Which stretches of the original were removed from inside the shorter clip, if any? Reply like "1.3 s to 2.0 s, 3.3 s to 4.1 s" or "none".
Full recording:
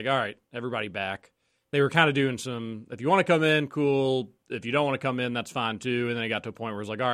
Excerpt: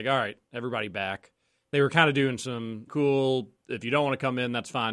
2.9 s to 3.7 s

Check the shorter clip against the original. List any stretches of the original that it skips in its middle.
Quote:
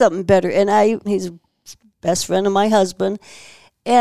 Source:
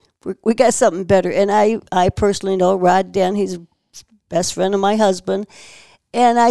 1.9 s to 3.3 s

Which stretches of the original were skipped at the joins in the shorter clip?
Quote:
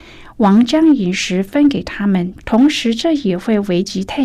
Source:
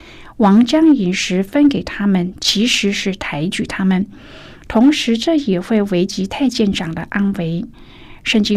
2.4 s to 4.6 s

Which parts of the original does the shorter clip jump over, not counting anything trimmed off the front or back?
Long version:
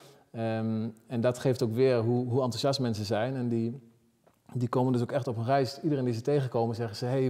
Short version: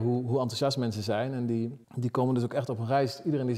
3.9 s to 4.4 s

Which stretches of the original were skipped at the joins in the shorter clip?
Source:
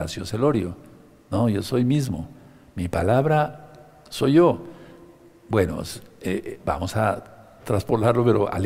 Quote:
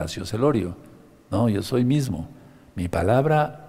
none

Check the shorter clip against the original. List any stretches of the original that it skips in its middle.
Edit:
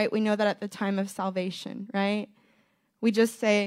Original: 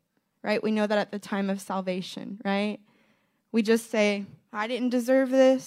none

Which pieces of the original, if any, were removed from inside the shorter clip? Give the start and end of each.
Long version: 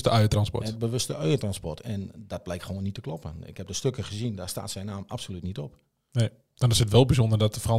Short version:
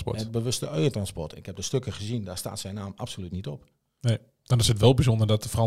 1.8 s to 3.5 s

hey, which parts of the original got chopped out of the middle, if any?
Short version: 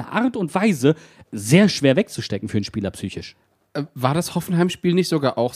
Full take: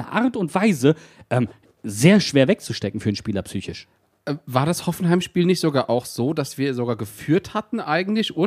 1.2 s to 1.7 s

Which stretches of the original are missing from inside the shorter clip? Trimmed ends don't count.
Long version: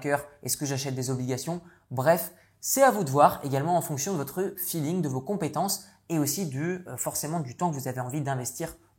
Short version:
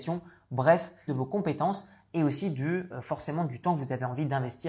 2.5 s to 5.0 s

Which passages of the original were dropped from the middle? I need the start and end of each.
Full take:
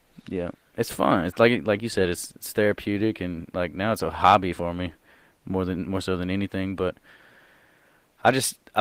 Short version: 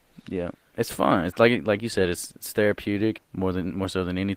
3.2 s to 5.3 s

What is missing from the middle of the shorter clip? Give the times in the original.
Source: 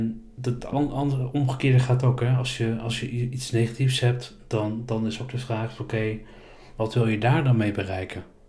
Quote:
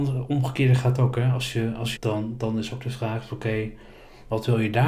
3.0 s to 4.4 s

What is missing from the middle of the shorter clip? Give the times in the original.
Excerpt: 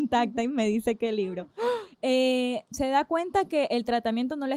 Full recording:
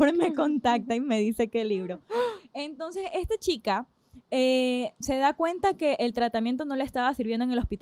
2.5 s to 4.2 s

